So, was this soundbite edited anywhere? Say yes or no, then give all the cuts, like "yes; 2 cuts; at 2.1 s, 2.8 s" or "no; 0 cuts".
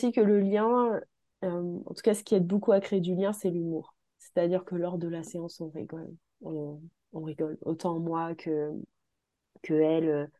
no; 0 cuts